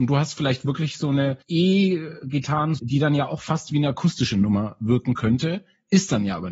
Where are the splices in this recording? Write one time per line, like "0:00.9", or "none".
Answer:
0:01.4
0:02.8